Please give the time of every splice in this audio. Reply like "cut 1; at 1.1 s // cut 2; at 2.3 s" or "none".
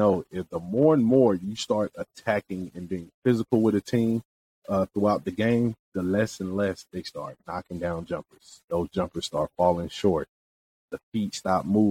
none